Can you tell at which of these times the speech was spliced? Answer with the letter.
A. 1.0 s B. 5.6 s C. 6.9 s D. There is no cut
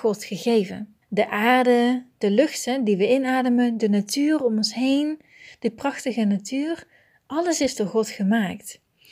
A